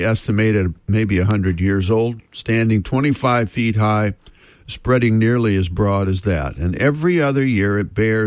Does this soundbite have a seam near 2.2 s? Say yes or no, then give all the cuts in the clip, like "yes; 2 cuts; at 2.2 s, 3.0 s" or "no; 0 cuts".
no; 0 cuts